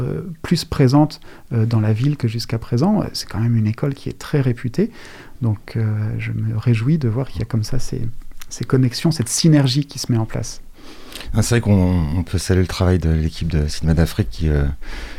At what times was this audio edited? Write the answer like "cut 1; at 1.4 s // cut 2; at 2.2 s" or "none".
none